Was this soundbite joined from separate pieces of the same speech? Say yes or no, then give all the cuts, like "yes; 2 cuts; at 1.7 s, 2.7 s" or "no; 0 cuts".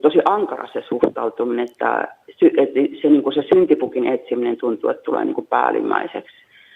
no; 0 cuts